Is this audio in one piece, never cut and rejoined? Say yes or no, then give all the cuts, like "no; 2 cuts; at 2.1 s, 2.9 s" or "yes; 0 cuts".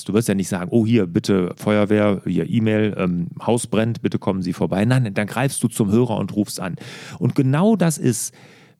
yes; 0 cuts